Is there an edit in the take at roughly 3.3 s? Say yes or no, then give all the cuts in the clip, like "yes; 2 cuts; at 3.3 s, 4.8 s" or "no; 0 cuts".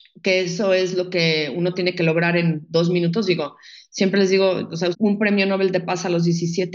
no; 1 cut; at 4.9 s